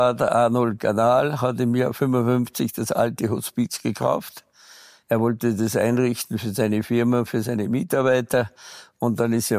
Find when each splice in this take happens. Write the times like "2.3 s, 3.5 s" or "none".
none